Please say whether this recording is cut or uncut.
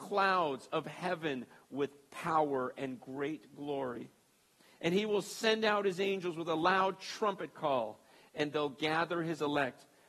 uncut